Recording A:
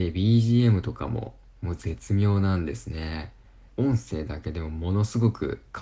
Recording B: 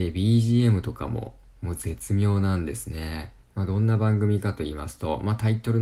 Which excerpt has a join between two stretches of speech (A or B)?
B